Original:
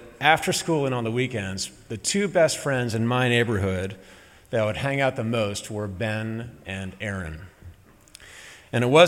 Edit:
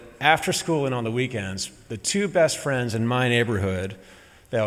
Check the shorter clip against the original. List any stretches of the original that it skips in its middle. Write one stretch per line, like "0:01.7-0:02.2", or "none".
none

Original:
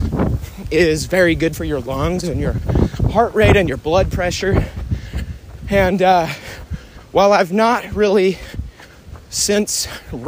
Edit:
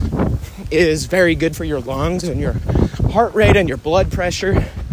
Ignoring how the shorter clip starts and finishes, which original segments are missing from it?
none

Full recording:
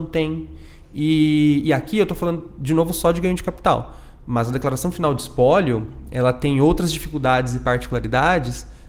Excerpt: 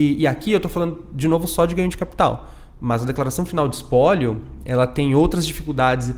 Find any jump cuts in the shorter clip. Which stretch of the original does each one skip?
none

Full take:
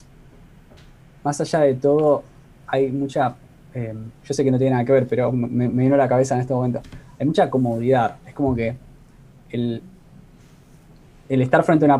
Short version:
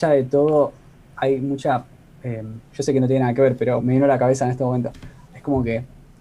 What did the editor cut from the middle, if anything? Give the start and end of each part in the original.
0:05.3-0:05.7
0:07.2-0:08.2

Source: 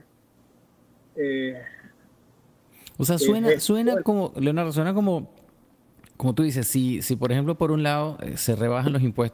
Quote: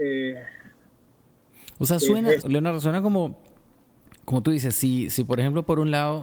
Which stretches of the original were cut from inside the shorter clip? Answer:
0:03.6-0:04.3

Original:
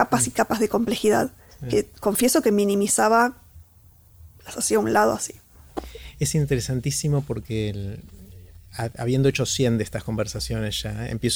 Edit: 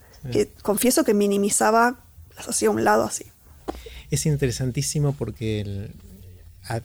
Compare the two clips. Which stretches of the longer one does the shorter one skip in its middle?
0:03.6-0:04.4

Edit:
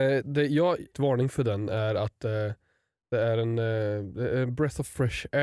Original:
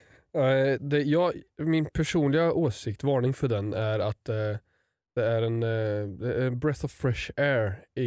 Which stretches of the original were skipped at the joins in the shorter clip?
0:01.5-0:03.0

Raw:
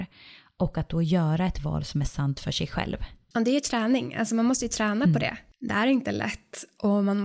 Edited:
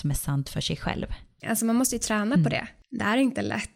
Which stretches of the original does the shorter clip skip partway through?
0:03.3-0:04.1

